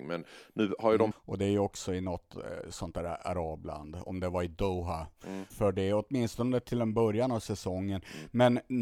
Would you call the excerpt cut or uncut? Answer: cut